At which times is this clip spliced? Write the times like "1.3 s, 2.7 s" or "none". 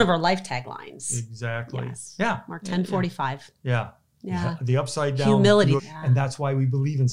5.8 s